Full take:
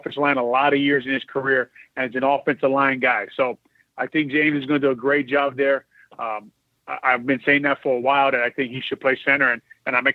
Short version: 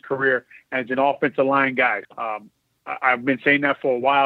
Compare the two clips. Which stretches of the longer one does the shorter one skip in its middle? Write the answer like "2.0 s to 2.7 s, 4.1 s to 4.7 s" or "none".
3.3 s to 6.1 s